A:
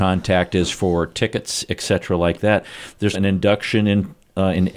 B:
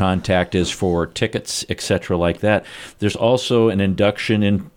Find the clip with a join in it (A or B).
A